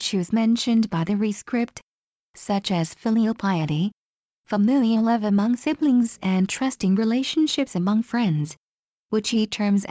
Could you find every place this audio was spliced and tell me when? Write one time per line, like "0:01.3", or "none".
none